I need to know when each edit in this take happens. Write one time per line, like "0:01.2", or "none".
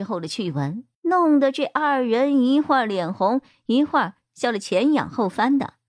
0:00.9